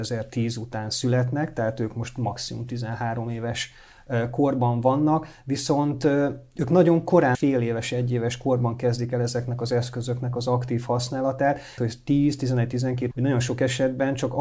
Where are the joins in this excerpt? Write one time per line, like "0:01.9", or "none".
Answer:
0:07.3
0:11.8
0:13.1

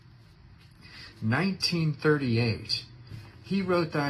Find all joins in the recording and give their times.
0:01.1

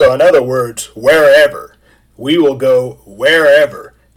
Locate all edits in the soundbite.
none

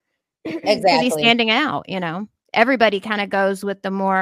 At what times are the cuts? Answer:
none

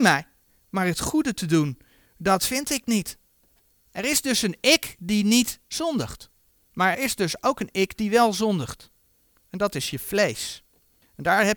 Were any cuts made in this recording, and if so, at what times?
0:06.9

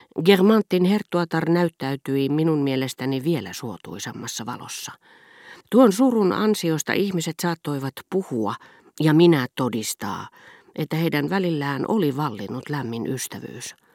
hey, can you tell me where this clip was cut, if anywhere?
0:05.6

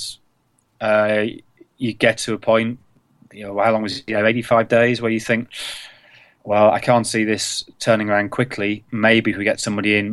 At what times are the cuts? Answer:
none

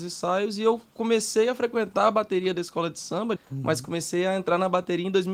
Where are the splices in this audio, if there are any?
0:03.4

